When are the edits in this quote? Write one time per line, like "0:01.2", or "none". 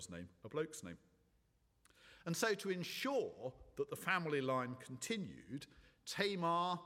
none